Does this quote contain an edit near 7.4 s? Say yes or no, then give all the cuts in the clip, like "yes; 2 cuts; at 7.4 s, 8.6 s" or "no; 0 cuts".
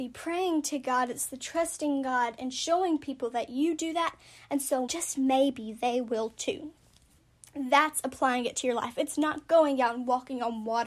no; 1 cut; at 4.9 s